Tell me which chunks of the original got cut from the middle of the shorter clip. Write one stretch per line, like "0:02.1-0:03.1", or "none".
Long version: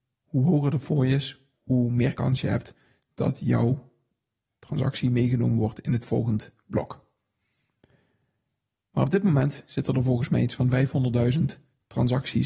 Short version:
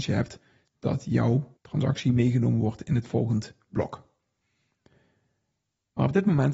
0:03.9-0:04.5